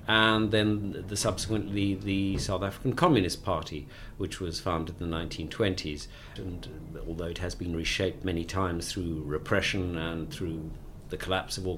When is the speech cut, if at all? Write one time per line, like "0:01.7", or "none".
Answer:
0:06.4